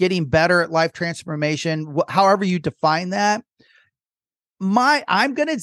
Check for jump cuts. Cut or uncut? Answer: uncut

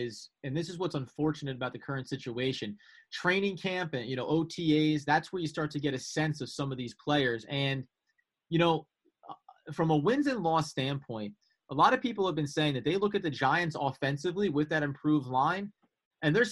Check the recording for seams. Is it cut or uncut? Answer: uncut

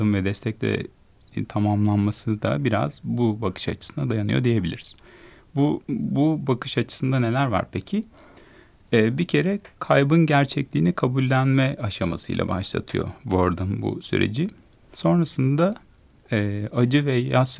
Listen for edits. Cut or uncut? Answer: uncut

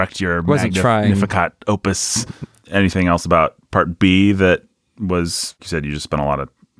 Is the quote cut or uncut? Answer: cut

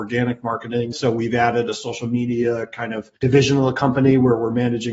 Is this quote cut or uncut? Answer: cut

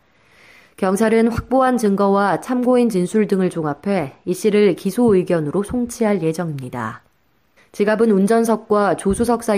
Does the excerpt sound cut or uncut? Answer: cut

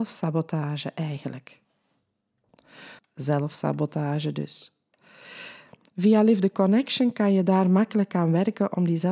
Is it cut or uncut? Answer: cut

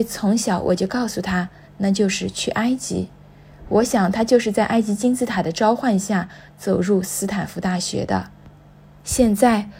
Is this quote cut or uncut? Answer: cut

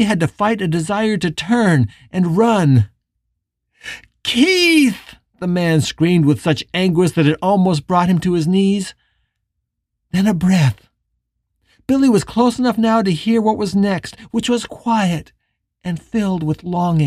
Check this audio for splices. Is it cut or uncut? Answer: uncut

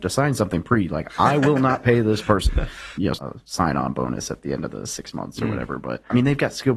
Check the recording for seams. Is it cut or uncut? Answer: cut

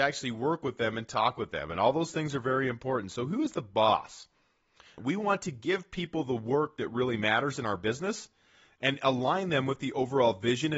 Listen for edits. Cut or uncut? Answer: cut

